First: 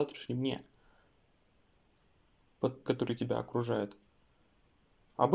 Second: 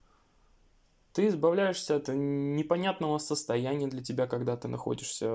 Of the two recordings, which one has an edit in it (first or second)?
first